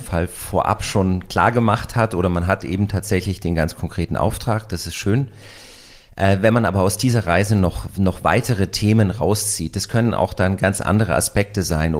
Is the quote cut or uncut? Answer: uncut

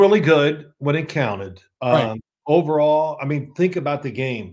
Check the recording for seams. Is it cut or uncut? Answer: uncut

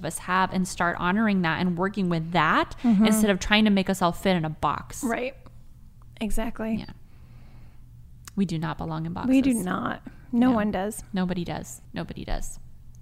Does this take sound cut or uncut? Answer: cut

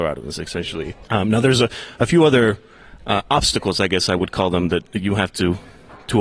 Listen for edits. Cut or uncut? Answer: uncut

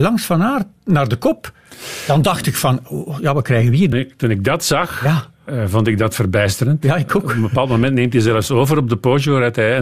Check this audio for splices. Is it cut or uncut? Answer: cut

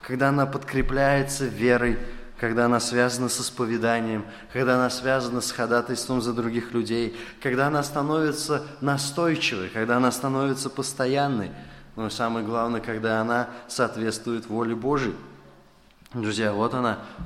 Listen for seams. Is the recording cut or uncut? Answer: uncut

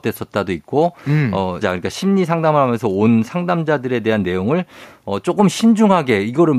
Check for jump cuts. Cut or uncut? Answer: cut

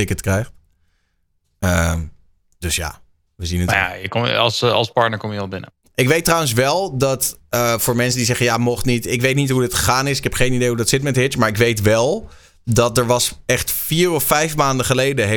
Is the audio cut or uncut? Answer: uncut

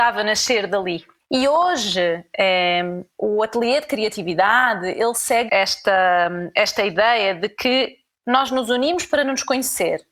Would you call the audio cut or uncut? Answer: cut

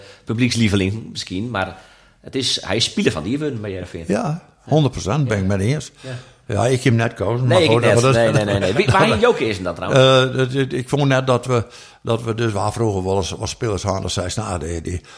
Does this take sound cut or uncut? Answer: uncut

